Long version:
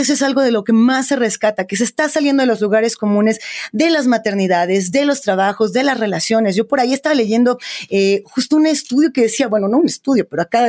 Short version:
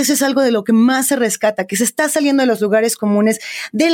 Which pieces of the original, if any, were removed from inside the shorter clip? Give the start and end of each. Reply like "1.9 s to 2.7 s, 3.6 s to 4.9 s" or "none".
none